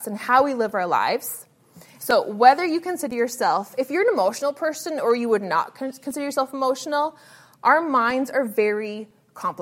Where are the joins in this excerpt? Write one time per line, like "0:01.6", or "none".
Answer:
0:02.0